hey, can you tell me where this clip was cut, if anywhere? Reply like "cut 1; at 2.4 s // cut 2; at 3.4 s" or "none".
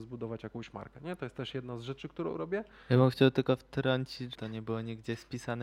cut 1; at 2.8 s // cut 2; at 4.3 s